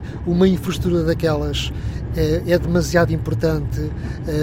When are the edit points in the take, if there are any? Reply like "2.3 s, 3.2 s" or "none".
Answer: none

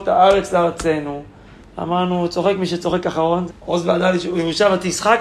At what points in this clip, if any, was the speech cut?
1.6 s, 3.5 s

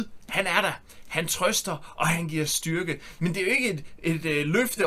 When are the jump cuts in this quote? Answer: none

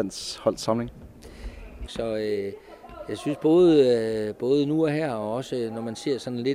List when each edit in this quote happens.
1.9 s

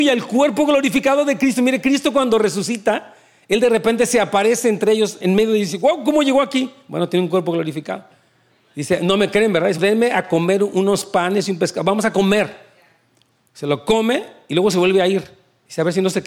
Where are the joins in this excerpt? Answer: 5.2 s, 9.8 s

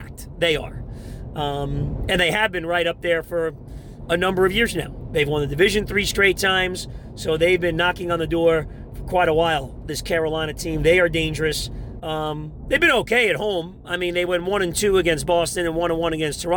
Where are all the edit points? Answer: 5.1 s, 12.0 s

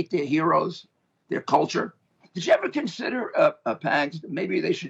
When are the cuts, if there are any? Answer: 2.2 s

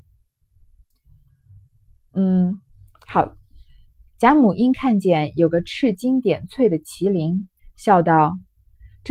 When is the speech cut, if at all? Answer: 4.1 s, 7.6 s

